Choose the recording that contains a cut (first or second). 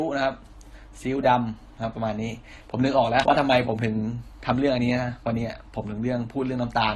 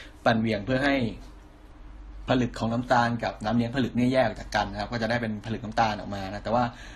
first